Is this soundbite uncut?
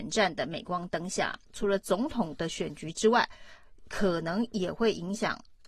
no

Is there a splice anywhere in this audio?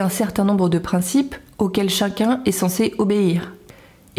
no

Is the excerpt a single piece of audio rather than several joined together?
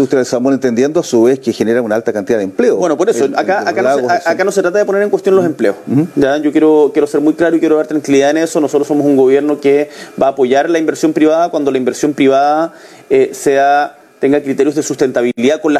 yes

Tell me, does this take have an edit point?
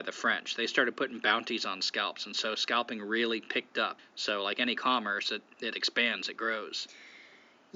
yes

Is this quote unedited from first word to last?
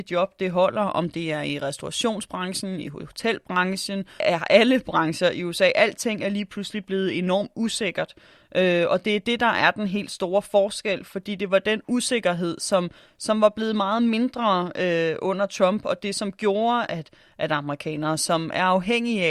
no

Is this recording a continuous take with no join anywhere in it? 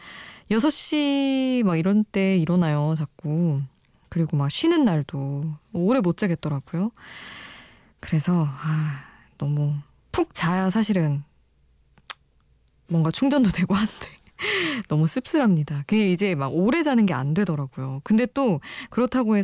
yes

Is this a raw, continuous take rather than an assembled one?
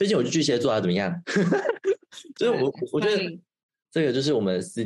no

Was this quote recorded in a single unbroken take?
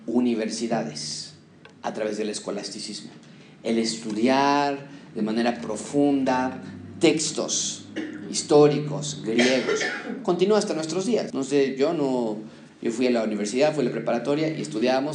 no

